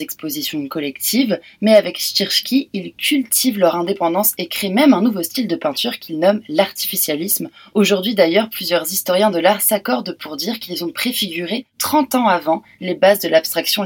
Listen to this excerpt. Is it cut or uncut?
uncut